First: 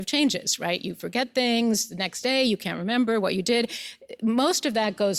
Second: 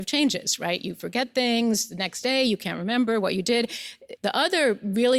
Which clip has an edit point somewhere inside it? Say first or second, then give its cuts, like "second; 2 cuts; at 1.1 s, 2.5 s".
second; 1 cut; at 4.2 s